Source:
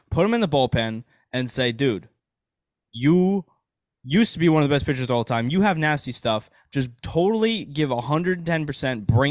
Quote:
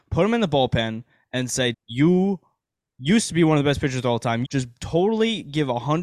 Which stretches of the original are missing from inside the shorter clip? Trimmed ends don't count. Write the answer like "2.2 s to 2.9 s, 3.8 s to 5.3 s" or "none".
1.7 s to 2.8 s, 5.5 s to 6.7 s